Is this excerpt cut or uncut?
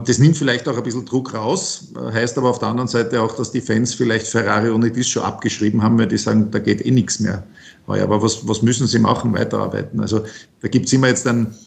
uncut